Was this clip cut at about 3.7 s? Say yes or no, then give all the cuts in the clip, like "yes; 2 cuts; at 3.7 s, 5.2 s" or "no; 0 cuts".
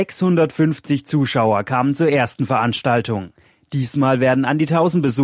no; 0 cuts